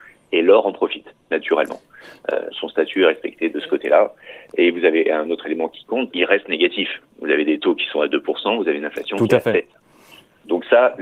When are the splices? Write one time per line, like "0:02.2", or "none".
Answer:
0:02.5
0:06.1